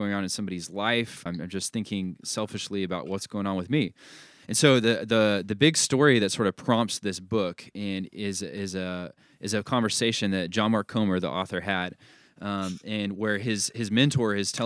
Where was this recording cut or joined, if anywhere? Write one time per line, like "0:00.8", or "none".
0:01.3